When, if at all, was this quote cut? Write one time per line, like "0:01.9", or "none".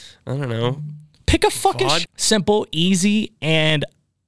0:02.0